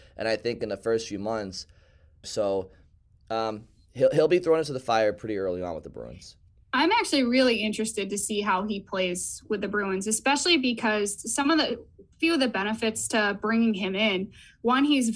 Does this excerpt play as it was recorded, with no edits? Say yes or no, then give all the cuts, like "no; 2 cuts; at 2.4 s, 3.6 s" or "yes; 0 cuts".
no; 1 cut; at 2.2 s